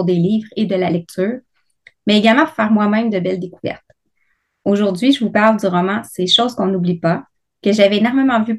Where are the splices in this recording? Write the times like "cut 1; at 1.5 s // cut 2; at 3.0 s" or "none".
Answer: none